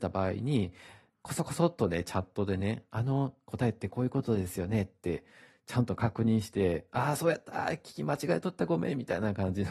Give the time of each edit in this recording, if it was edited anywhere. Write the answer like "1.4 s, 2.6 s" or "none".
none